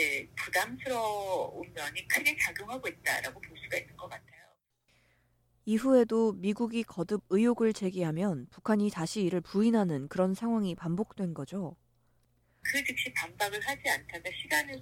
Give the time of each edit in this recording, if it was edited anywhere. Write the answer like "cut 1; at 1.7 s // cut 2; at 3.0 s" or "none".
cut 1; at 12.6 s